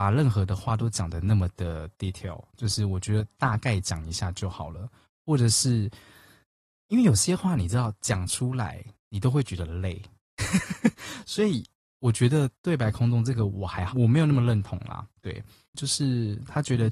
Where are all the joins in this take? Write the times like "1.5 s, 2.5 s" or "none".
13.9 s, 15.7 s